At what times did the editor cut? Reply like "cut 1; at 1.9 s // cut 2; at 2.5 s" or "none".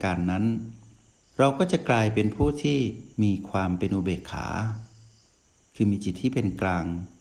cut 1; at 3.1 s

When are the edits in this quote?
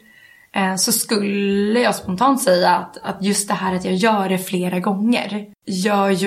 none

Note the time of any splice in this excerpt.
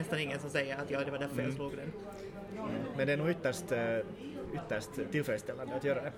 cut 1; at 1.0 s

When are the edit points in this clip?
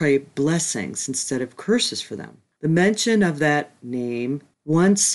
cut 1; at 2.6 s

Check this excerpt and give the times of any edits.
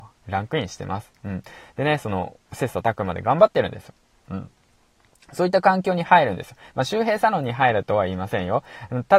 none

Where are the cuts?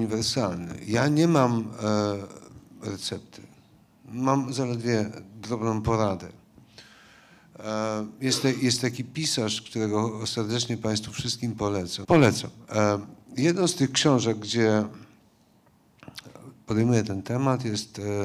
cut 1; at 12.0 s

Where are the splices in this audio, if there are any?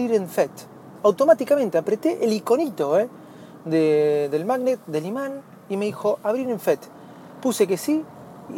none

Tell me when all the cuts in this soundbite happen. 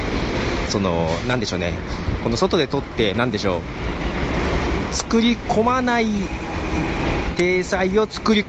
cut 1; at 3.1 s

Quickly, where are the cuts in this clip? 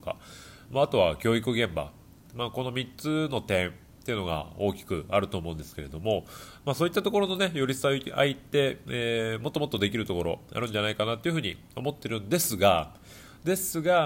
none

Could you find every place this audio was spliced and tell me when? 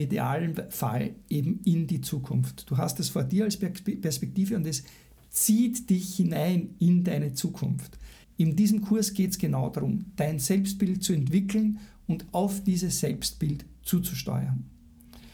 cut 1; at 8.2 s

